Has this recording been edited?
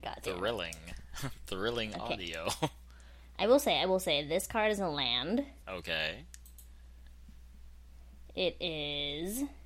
no; 0 cuts

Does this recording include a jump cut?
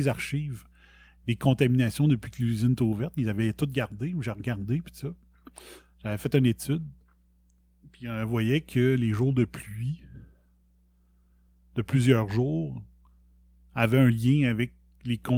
no; 0 cuts

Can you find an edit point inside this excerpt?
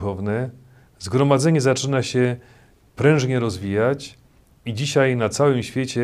no; 0 cuts

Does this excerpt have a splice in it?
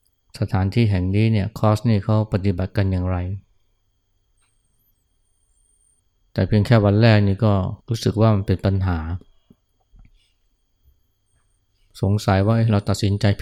yes; 1 cut; at 7.8 s

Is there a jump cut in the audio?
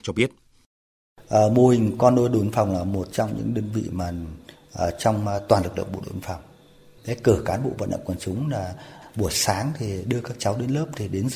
no; 0 cuts

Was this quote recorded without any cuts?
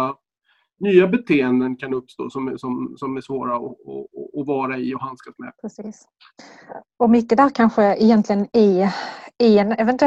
no; 1 cut; at 5.6 s

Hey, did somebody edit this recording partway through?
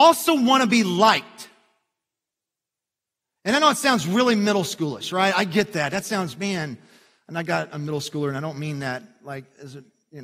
no; 0 cuts

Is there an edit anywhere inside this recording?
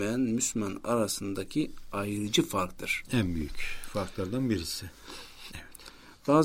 yes; 1 cut; at 5.5 s

